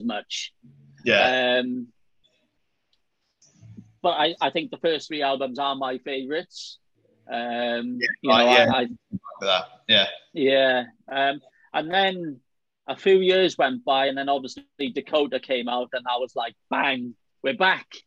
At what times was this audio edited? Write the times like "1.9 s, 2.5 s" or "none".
none